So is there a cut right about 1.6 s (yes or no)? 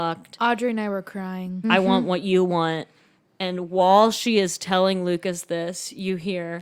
yes